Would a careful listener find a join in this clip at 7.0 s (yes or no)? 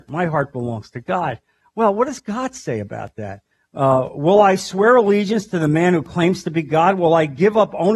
no